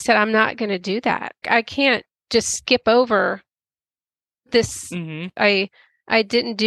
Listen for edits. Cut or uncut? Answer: cut